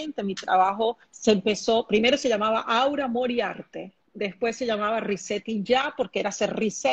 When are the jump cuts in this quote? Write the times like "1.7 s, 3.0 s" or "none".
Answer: 1.1 s